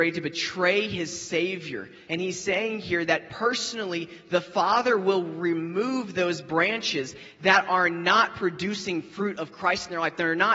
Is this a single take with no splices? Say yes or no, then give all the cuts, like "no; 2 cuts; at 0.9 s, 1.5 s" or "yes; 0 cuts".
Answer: no; 1 cut; at 2.1 s